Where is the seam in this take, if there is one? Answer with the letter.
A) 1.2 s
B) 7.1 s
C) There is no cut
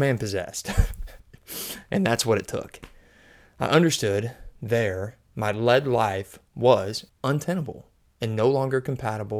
B